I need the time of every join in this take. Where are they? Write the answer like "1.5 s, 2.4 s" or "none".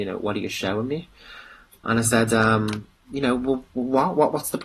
3.0 s